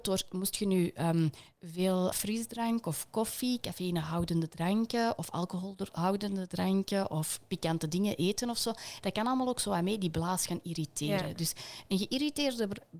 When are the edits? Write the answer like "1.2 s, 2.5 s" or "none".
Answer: 2.1 s